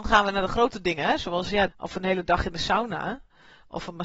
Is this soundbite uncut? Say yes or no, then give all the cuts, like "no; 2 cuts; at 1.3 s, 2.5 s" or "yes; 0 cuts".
no; 1 cut; at 1.7 s